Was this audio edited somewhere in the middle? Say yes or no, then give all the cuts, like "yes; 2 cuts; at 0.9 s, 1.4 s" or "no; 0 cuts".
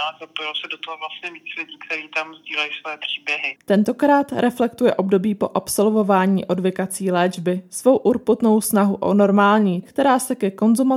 yes; 2 cuts; at 3.6 s, 9.8 s